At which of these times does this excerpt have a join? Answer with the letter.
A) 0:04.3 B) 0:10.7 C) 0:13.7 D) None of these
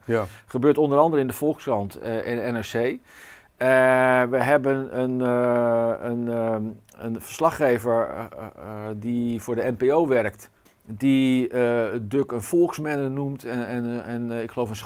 B